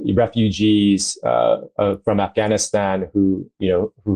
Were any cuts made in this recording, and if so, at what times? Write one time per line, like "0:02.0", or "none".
none